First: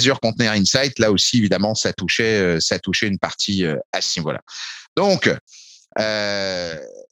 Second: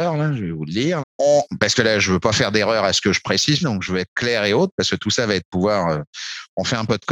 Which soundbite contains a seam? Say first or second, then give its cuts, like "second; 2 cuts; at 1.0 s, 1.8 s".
second; 2 cuts; at 1.0 s, 3.6 s